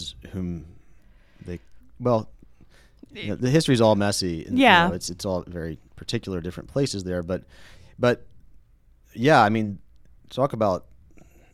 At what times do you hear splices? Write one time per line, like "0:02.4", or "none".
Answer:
0:10.2